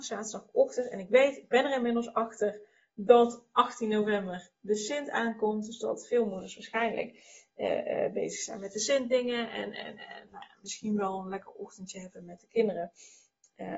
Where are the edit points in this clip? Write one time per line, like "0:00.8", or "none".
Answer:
0:10.3